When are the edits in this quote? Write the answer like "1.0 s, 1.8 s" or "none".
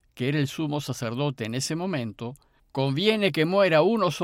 2.6 s